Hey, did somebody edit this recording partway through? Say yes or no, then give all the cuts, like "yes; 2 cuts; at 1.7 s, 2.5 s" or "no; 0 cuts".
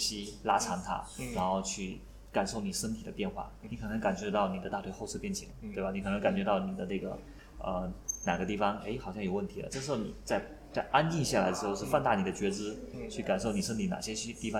no; 0 cuts